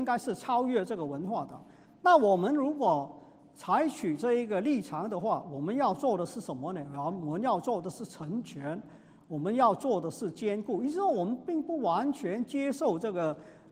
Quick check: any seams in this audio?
no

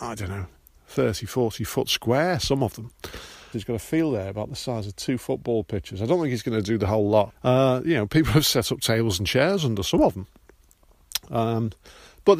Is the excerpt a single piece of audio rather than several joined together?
no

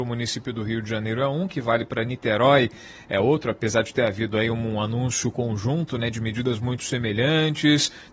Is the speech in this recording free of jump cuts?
yes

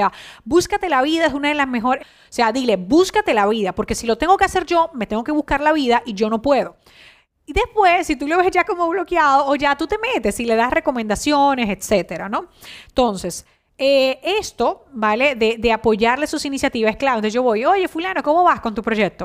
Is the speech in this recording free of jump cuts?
no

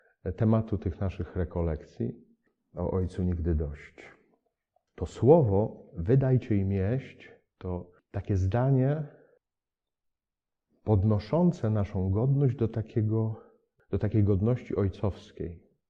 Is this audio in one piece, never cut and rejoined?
yes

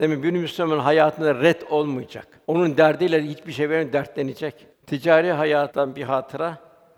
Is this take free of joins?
no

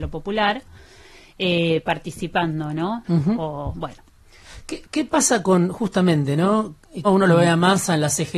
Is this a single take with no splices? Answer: no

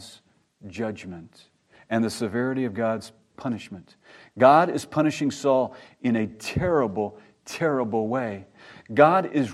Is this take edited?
no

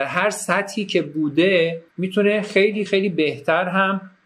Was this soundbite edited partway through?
yes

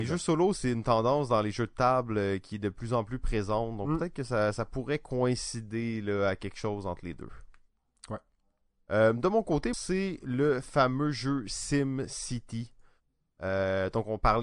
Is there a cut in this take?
yes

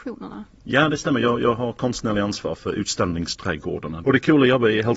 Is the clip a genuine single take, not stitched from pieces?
no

